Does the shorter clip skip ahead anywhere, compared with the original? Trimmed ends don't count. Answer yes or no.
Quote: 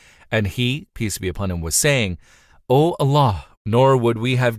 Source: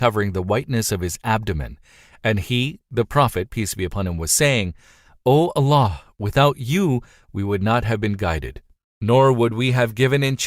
yes